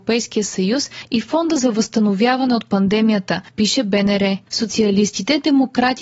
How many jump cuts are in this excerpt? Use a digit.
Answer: 1